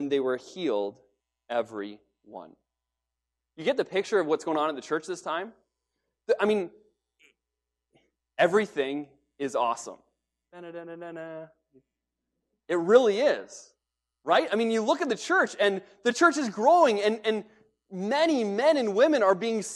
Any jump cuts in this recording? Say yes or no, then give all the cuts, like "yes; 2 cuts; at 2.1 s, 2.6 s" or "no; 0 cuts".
no; 0 cuts